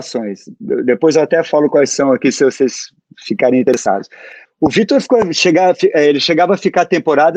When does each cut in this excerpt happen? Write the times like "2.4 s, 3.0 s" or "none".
4.5 s